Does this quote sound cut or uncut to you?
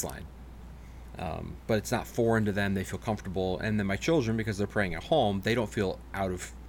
uncut